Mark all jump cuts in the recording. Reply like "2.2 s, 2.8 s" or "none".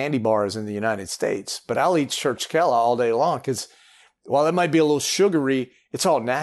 none